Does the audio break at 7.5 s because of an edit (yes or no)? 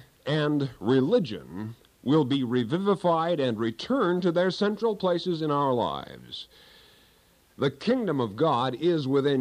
yes